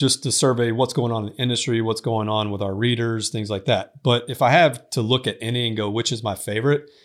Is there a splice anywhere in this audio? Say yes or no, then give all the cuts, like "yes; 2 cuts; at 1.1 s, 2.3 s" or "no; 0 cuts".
no; 0 cuts